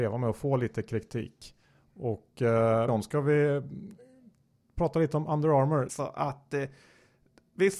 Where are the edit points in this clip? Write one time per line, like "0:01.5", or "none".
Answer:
0:02.9
0:05.9